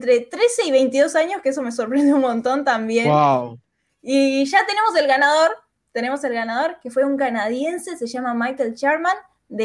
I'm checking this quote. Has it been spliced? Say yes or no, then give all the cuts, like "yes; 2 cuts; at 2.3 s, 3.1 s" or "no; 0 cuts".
no; 0 cuts